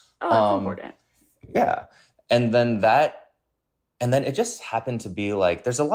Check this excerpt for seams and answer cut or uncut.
uncut